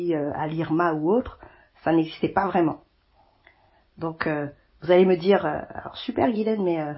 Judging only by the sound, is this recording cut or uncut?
uncut